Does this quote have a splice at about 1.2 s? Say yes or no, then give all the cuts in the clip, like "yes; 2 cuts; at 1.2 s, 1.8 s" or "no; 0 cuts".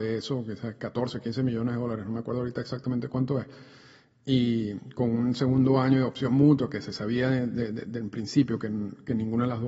no; 0 cuts